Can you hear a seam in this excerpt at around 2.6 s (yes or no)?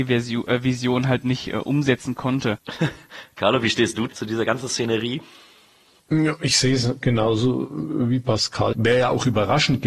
yes